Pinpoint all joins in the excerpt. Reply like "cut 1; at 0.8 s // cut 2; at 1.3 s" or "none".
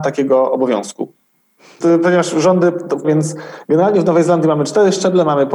cut 1; at 1.8 s // cut 2; at 3.0 s